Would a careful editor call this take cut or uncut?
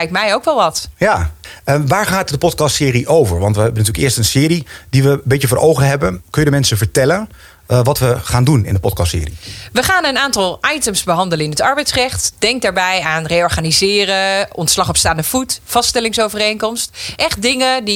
uncut